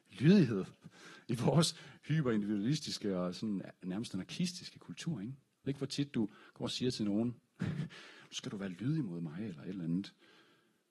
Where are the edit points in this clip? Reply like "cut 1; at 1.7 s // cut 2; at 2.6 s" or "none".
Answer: none